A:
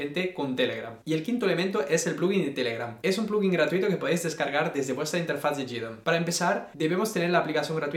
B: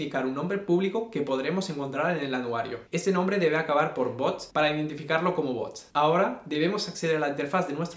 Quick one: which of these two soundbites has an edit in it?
A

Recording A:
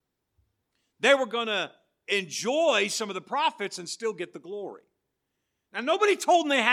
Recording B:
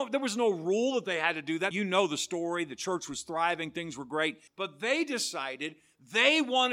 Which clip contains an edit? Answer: B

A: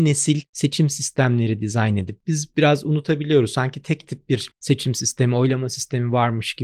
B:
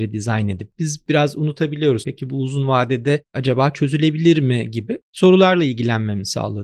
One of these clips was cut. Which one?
B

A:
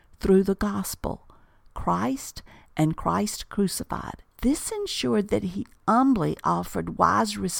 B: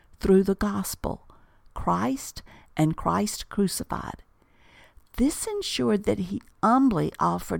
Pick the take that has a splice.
A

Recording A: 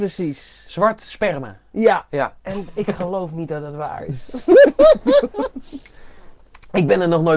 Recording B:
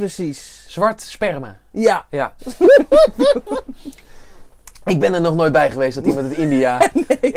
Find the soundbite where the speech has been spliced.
B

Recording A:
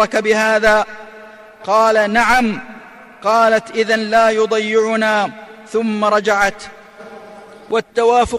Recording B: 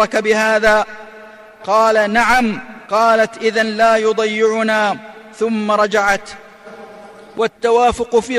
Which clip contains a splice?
B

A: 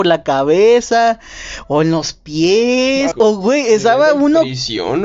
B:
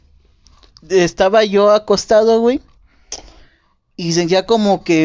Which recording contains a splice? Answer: A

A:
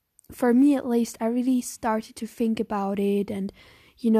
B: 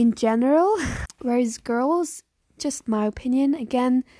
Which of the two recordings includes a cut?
B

